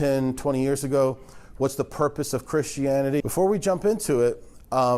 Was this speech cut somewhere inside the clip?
yes; 1 cut; at 3.2 s

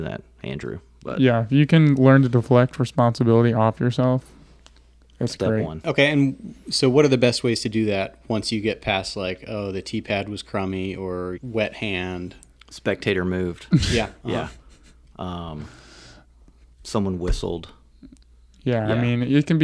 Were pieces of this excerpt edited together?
yes; 1 cut; at 11.4 s

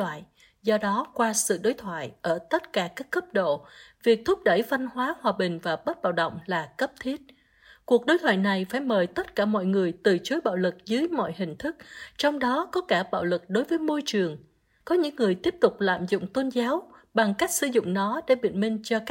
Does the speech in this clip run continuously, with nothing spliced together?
no; 1 cut; at 14.8 s

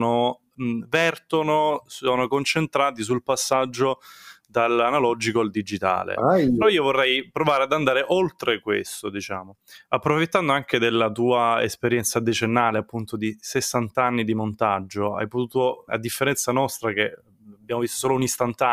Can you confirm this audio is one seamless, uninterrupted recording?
no; 1 cut; at 15.9 s

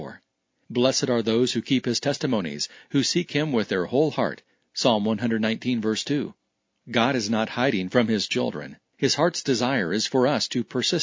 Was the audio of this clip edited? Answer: no; 0 cuts

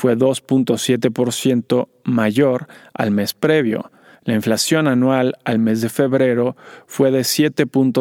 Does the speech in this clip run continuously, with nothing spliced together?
no; 1 cut; at 4.1 s

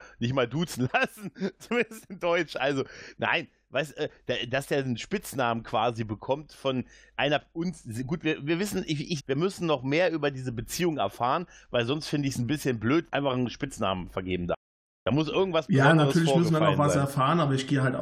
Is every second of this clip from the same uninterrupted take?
no; 2 cuts; at 9.2 s, 13.1 s

